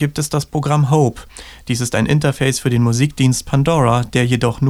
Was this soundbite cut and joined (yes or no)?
no